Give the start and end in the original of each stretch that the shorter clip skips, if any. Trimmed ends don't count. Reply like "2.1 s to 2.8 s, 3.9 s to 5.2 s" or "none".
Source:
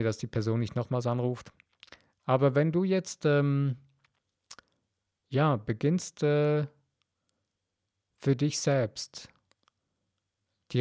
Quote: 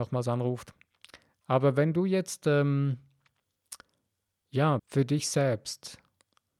5.6 s to 8.1 s